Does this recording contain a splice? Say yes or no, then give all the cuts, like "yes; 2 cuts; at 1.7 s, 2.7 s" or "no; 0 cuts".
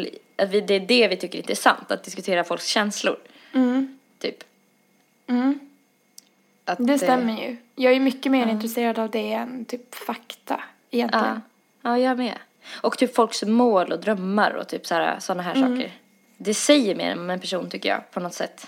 no; 0 cuts